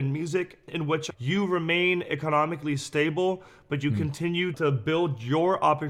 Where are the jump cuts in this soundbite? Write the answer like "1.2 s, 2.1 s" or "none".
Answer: none